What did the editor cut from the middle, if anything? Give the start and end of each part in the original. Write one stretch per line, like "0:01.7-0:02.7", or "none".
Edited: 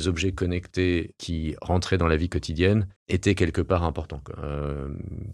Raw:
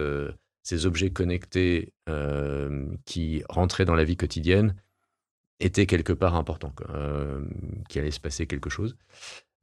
0:02.0-0:03.0
0:04.8-0:05.5